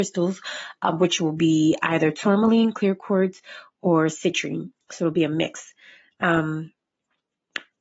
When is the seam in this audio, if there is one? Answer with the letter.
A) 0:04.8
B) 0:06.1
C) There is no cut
A